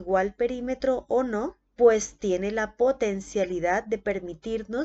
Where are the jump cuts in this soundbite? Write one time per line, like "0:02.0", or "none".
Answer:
0:01.7